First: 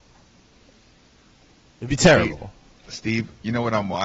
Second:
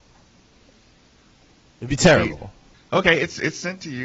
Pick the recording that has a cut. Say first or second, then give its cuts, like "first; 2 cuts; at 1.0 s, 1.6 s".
second; 1 cut; at 2.7 s